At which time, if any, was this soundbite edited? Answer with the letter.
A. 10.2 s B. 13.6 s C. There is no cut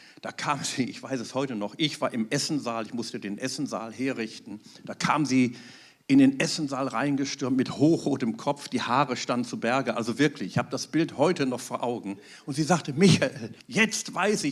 B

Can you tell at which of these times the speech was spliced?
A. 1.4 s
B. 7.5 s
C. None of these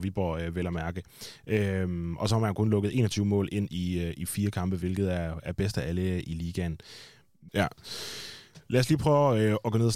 B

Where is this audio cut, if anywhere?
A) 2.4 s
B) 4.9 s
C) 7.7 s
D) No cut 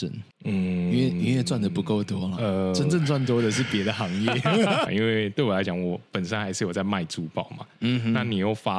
B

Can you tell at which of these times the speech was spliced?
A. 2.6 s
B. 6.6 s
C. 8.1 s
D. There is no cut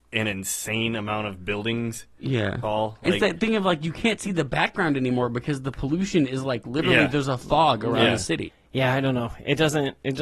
A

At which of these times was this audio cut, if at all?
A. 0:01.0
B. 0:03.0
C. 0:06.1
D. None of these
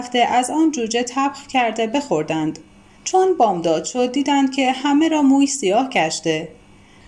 B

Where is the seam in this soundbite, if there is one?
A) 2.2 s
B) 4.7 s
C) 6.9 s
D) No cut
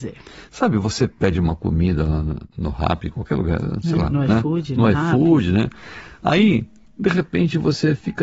D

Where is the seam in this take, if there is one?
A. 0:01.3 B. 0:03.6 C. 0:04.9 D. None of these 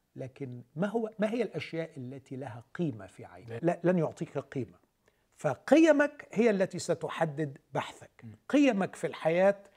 B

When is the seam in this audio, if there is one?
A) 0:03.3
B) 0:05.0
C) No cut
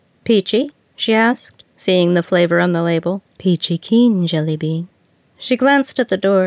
A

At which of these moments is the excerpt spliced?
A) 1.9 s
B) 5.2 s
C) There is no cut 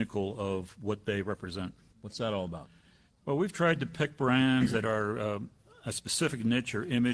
A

